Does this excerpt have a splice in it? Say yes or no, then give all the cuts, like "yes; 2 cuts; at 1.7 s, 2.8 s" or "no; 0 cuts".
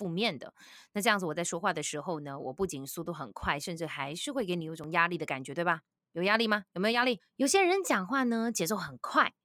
yes; 1 cut; at 7.2 s